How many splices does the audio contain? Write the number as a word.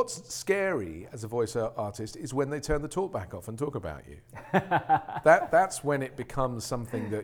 zero